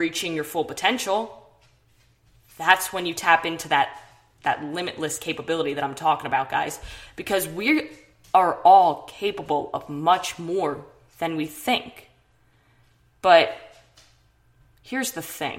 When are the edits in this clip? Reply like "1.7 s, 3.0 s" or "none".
none